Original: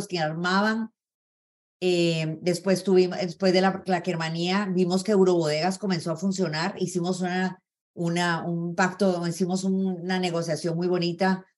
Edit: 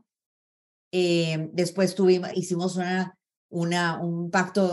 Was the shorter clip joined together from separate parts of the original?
yes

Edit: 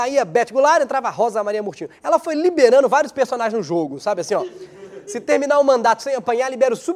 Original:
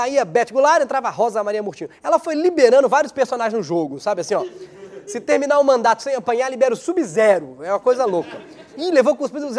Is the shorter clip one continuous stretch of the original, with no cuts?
yes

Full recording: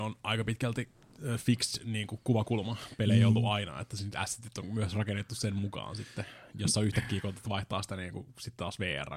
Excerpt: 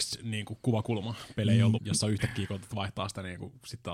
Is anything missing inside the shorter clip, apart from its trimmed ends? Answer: yes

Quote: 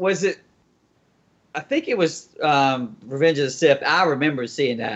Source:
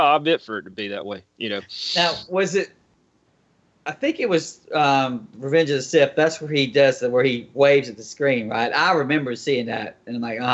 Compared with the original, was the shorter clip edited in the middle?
yes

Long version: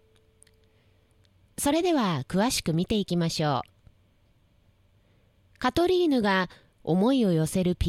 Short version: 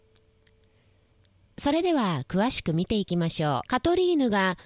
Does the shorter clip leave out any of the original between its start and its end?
yes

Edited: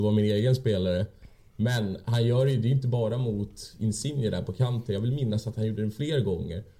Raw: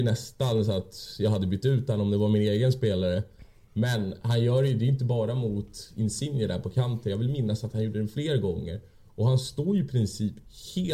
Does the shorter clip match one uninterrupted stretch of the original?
yes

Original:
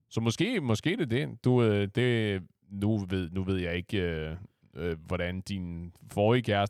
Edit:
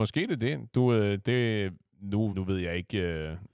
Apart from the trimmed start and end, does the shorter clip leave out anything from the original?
yes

